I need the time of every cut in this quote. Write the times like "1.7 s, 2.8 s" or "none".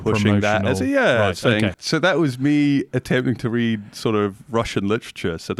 1.7 s